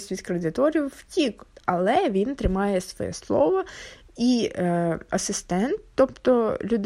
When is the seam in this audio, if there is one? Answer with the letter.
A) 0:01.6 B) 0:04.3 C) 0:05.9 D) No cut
D